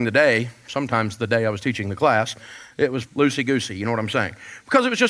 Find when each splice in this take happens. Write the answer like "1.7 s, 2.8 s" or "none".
3.1 s